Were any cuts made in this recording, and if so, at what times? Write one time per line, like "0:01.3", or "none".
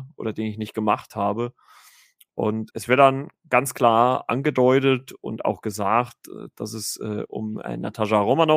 0:02.7